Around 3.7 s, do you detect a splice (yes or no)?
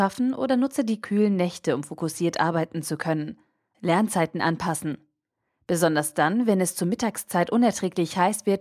yes